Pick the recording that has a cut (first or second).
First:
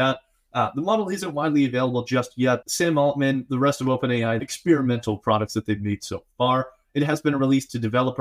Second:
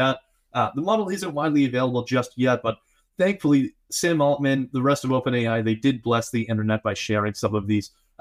first